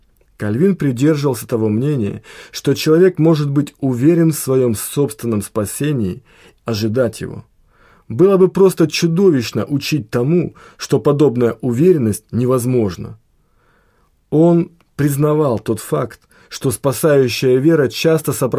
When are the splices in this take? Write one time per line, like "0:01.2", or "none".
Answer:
0:06.6